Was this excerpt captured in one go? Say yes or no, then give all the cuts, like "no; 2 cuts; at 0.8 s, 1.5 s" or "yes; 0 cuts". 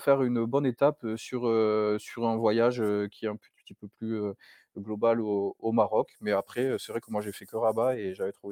yes; 0 cuts